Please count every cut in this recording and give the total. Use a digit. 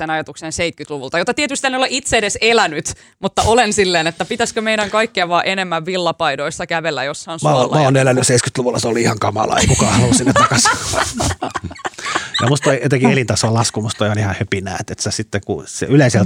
0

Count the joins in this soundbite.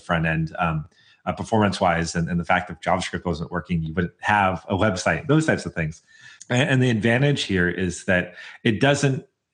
1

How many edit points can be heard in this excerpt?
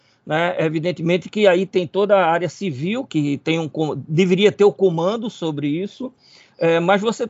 1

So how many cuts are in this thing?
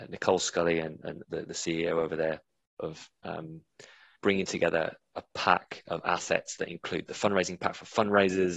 3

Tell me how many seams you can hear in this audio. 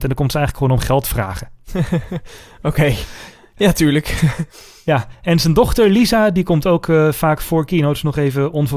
0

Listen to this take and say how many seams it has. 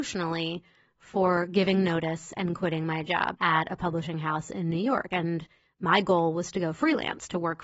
0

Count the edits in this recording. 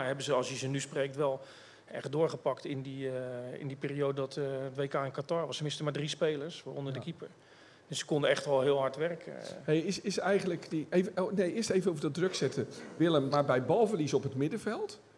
1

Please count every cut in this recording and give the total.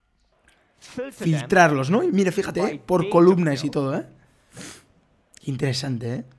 0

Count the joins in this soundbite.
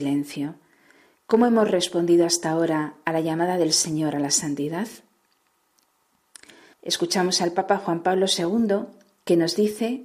1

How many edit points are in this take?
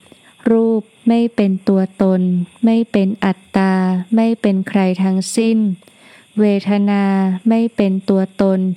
0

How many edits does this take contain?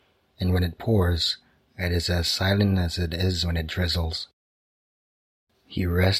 0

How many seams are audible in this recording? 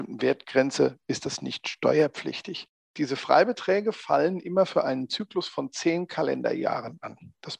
0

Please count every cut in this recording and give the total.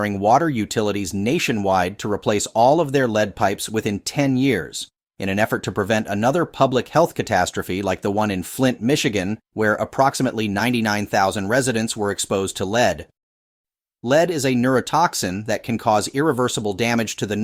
0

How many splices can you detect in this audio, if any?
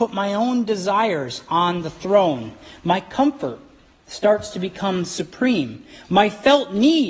0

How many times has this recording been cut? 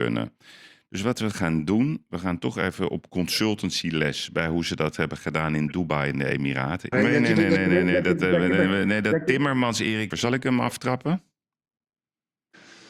2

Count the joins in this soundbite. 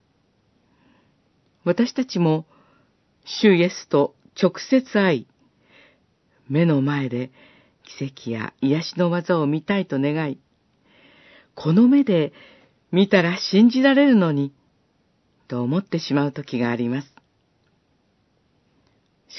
0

